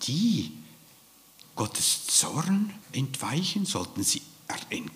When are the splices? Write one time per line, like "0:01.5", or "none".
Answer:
0:01.4
0:02.8